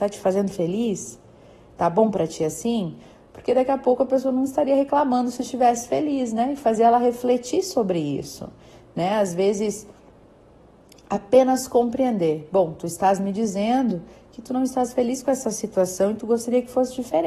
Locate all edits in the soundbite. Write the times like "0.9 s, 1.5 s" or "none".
none